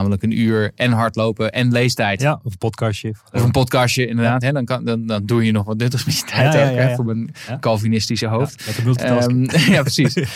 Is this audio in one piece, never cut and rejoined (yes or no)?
yes